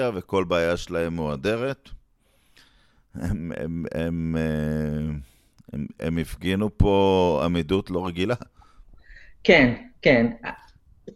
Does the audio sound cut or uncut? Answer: cut